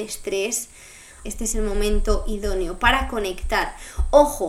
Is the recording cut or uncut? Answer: cut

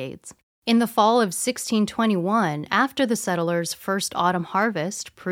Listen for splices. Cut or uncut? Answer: uncut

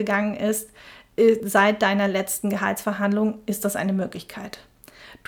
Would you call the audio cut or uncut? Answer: uncut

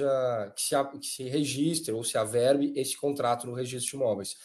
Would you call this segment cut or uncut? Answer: uncut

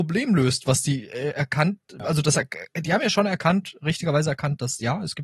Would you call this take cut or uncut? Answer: uncut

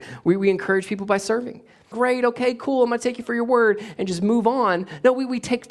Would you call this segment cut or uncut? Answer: cut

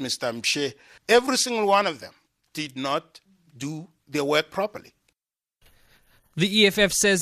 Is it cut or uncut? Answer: uncut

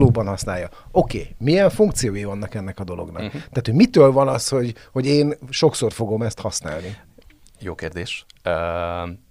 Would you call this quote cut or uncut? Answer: uncut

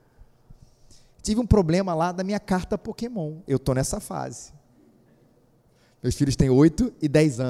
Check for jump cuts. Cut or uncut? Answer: uncut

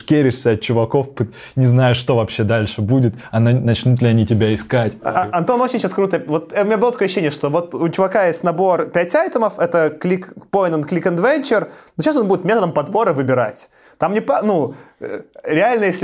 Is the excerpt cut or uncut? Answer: uncut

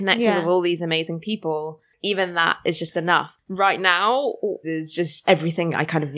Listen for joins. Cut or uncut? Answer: cut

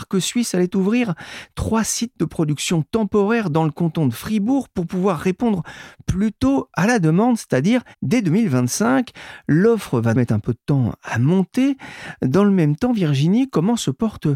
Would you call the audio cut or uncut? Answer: cut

